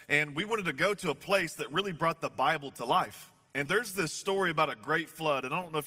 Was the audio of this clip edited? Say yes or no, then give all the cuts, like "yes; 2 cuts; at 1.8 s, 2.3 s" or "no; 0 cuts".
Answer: yes; 1 cut; at 3.7 s